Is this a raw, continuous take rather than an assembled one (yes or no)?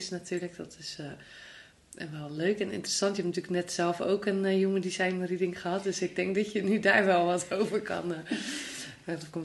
yes